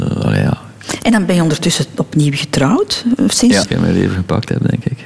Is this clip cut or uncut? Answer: cut